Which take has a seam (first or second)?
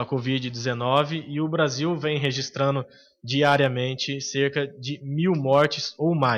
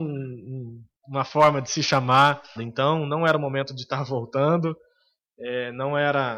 second